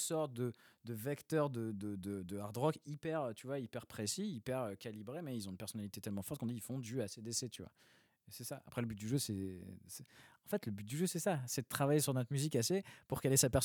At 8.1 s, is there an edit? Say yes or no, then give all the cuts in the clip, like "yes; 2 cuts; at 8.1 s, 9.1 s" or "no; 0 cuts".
no; 0 cuts